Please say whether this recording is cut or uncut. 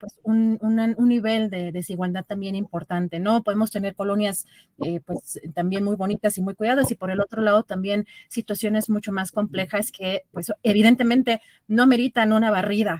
uncut